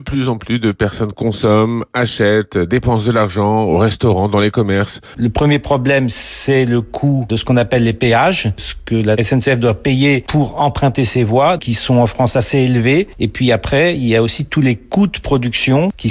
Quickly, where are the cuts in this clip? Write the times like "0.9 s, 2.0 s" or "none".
5.1 s, 11.6 s